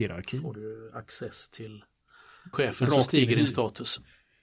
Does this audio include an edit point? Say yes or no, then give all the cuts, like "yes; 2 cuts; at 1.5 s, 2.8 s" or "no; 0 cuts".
yes; 1 cut; at 2.5 s